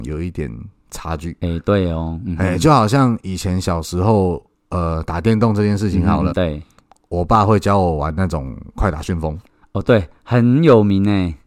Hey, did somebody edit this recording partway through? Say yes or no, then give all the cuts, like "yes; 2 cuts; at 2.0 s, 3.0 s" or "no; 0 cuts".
yes; 1 cut; at 6.3 s